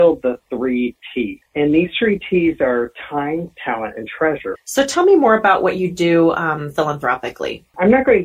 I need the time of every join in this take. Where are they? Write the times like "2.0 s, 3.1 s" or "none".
4.5 s